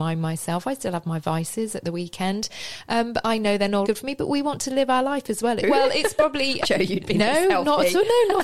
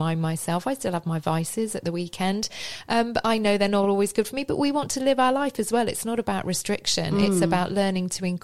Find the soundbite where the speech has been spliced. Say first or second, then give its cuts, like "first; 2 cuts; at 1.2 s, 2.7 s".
first; 3 cuts; at 3.8 s, 5.6 s, 6.6 s